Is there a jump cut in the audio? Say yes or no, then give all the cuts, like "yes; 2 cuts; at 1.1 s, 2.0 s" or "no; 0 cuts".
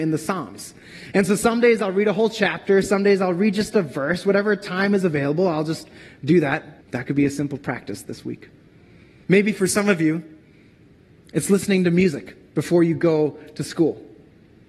yes; 2 cuts; at 6.8 s, 9.2 s